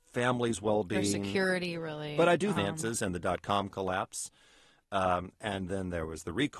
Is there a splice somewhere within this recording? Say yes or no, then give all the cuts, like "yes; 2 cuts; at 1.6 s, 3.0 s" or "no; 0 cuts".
yes; 1 cut; at 2.6 s